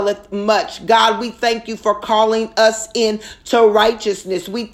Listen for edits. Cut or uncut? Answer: uncut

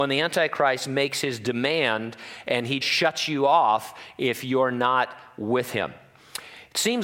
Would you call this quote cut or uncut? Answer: cut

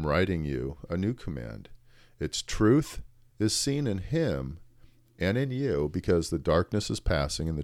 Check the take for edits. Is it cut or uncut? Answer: uncut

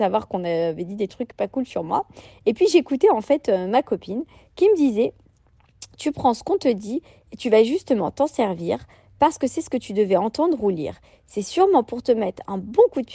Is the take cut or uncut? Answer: uncut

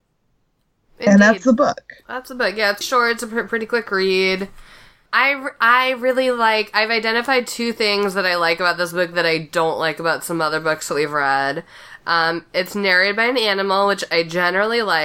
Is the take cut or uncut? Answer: cut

